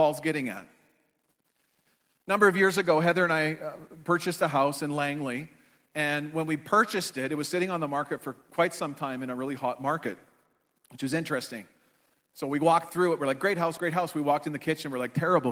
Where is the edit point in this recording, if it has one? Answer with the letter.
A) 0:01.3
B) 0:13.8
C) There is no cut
B